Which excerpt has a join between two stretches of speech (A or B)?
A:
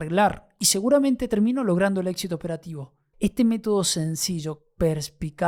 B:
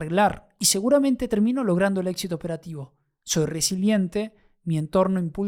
A